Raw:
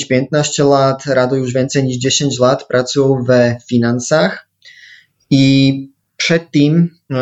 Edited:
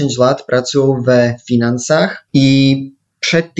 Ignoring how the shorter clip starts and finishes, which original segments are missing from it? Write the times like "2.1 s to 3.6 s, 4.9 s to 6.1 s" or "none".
4.5 s to 5.2 s